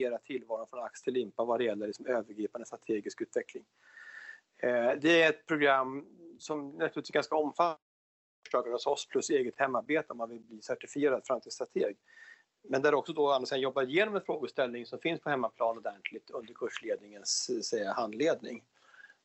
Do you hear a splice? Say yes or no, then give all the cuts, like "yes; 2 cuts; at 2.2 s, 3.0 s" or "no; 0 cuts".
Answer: no; 0 cuts